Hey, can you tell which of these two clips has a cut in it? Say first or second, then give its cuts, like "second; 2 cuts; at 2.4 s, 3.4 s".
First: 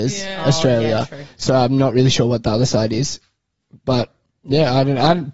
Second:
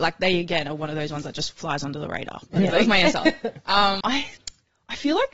second; 2 cuts; at 2.7 s, 4.0 s